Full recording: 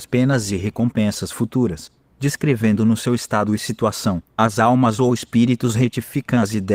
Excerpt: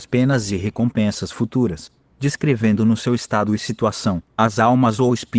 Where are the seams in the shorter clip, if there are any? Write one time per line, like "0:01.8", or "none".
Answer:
none